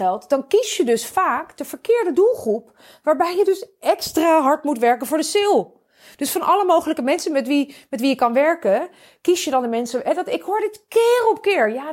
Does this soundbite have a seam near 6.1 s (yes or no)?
no